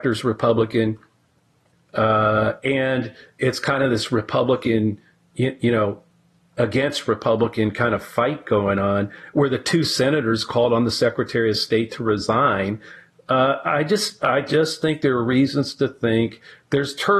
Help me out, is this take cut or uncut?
cut